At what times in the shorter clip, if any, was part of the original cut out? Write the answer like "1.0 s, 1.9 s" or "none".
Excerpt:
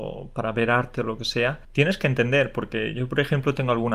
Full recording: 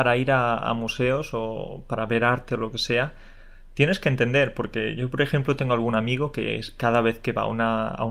1.6 s